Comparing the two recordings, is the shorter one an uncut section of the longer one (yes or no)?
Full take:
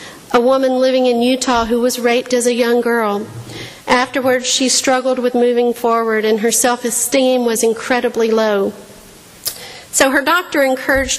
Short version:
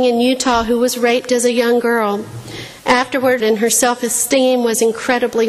no